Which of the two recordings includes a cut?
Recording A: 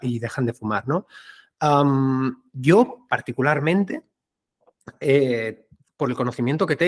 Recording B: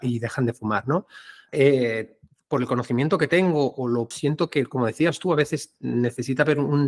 B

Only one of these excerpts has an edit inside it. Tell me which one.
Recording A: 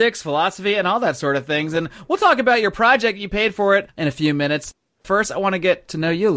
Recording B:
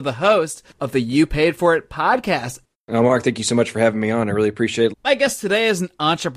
B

